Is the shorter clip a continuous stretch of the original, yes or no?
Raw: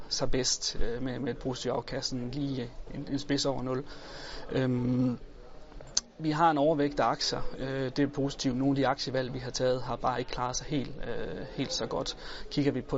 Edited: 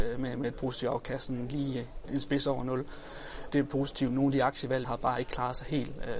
no